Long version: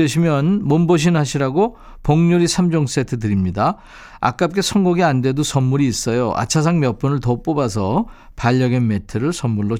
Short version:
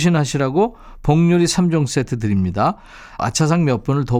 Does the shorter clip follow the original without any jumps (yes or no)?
no